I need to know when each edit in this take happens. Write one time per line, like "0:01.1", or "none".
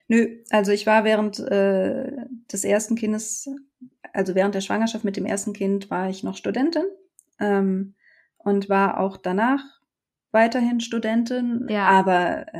0:11.7